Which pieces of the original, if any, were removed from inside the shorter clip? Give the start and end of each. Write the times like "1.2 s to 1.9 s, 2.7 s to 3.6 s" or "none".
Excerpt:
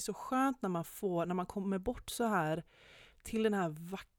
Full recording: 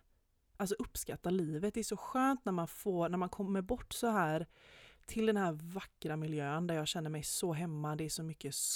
none